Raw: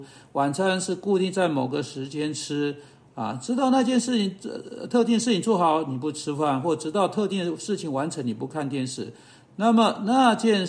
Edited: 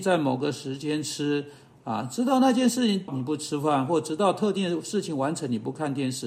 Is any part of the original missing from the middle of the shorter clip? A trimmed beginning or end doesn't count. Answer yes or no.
yes